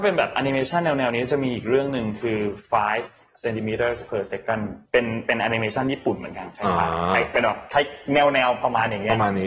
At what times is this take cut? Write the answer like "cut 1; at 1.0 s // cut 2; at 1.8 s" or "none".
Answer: cut 1; at 4.9 s